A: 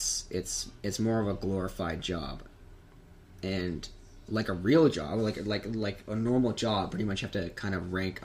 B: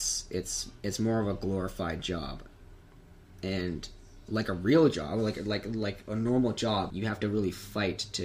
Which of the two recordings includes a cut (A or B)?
B